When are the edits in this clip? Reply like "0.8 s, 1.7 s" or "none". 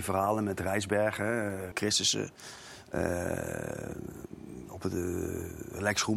1.7 s